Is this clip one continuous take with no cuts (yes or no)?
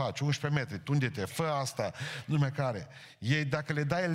yes